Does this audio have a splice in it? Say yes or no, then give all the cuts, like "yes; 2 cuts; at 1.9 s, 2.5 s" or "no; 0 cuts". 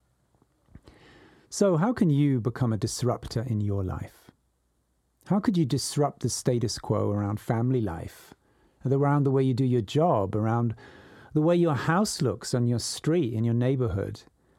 no; 0 cuts